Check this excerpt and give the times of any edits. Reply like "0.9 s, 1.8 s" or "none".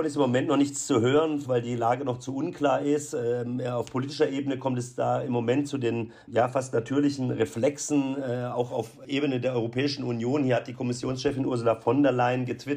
1.4 s, 6.2 s